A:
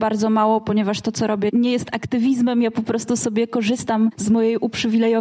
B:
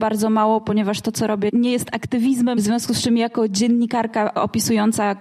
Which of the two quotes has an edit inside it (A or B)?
B